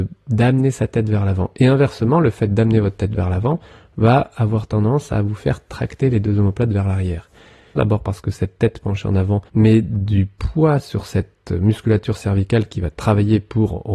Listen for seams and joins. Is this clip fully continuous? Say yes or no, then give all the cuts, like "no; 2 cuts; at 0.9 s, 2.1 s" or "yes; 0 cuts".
no; 2 cuts; at 7.8 s, 9.5 s